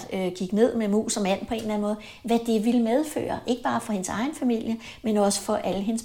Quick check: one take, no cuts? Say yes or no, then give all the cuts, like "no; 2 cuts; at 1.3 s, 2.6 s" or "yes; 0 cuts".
yes; 0 cuts